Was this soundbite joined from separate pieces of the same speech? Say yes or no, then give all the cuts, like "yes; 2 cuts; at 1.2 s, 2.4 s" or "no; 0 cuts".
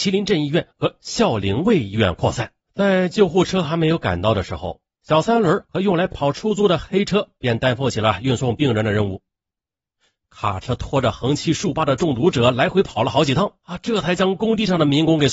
yes; 2 cuts; at 2.6 s, 10.2 s